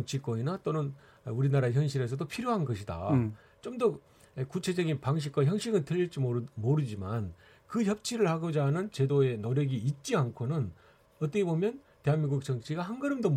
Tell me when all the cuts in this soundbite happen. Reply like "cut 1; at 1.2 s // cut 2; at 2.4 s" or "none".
none